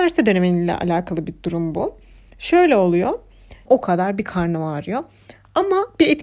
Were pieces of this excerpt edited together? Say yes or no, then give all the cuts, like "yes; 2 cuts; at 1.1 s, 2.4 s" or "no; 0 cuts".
yes; 1 cut; at 3.7 s